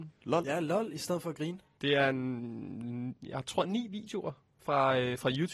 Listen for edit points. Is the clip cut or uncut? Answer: cut